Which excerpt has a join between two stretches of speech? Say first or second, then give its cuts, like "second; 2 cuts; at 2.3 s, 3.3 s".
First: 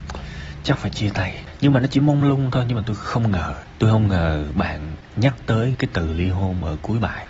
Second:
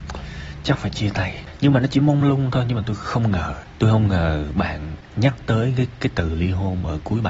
first; 1 cut; at 5.7 s